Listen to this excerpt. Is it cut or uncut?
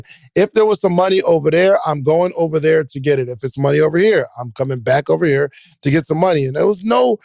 uncut